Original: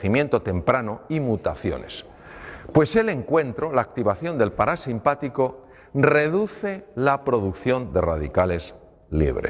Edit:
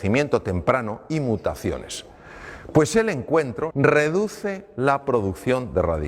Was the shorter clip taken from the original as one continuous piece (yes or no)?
no